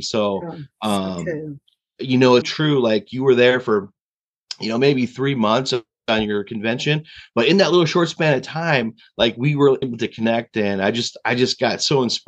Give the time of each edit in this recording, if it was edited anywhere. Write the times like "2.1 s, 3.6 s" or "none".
2.4 s, 9.8 s